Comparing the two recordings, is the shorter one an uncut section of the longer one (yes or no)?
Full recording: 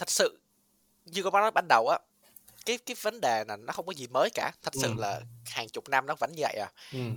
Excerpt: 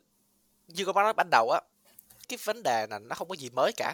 no